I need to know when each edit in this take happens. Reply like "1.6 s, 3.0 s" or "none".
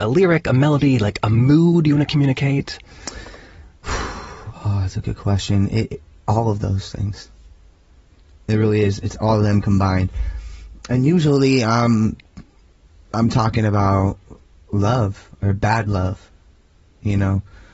none